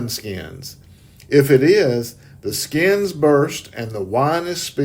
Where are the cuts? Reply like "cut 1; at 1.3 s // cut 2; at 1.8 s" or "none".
none